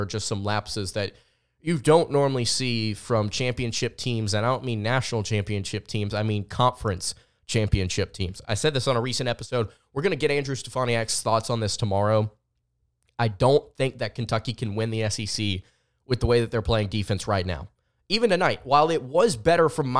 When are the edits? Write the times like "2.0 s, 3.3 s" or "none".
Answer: none